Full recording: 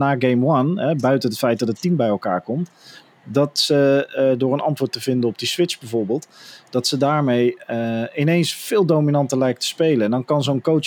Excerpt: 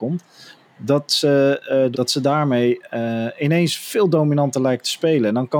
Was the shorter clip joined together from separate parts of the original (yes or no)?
yes